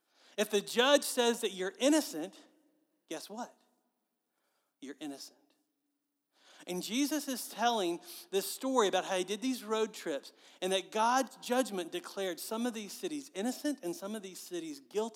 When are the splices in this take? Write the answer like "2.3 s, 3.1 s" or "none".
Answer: none